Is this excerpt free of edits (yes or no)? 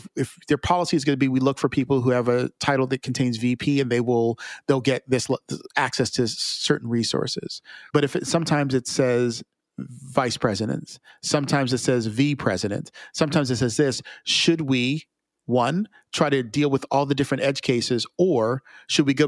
no